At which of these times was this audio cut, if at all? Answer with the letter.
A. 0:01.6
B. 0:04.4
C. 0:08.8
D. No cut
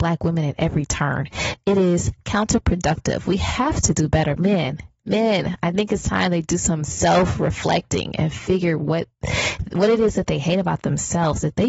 B